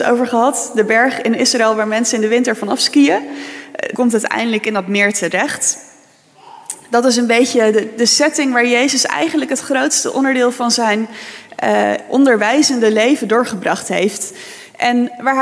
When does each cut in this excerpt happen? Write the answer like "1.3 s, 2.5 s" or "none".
3.9 s